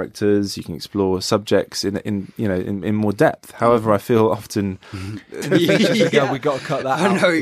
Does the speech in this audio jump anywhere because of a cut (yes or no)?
yes